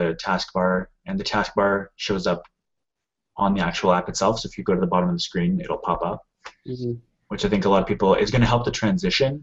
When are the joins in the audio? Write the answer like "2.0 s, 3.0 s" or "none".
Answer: none